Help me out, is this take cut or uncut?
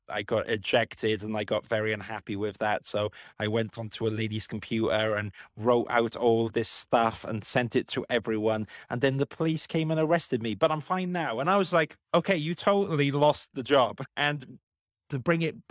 cut